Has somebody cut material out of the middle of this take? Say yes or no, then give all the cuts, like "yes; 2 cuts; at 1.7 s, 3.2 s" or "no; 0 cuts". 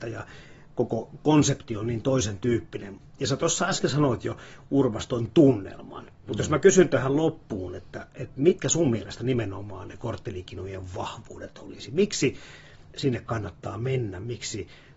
no; 0 cuts